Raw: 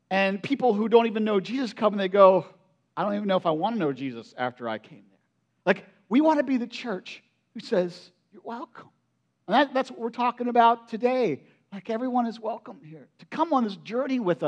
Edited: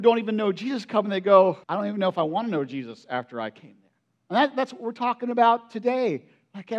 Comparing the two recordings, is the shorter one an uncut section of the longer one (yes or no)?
no